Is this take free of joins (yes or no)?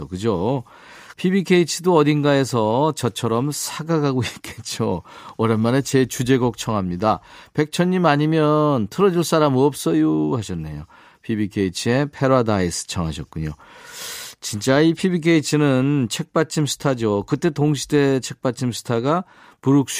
no